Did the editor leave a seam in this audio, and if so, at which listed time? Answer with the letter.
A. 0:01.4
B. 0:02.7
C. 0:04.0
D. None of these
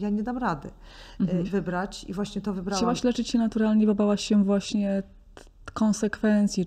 A